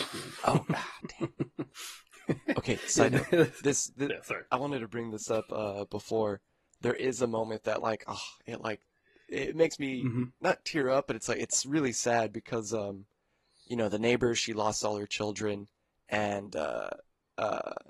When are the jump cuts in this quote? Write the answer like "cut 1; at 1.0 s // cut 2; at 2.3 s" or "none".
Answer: none